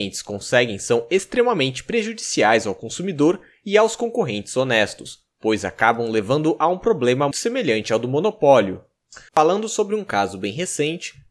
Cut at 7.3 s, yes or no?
yes